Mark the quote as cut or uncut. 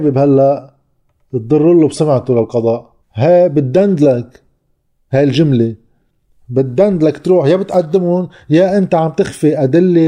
cut